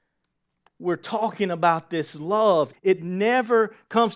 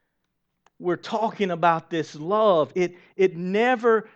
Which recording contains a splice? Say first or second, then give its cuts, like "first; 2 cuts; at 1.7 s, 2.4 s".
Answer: first; 1 cut; at 2.7 s